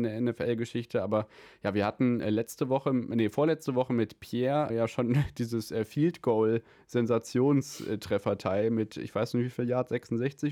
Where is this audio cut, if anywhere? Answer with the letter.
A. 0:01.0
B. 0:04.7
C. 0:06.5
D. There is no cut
B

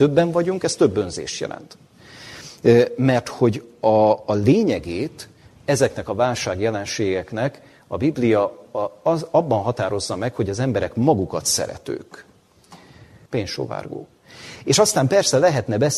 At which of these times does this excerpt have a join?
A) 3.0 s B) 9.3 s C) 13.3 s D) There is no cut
C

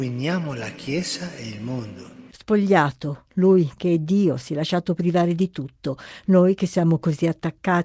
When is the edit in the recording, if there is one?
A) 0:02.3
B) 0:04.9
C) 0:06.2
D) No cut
A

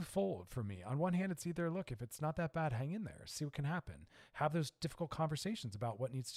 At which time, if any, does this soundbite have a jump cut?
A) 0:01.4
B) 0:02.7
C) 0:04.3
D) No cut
D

